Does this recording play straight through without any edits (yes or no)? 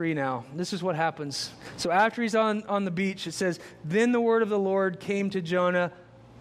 yes